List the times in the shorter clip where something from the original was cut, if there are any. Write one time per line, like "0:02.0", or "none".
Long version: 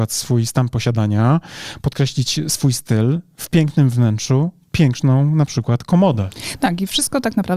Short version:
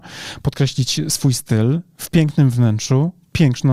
none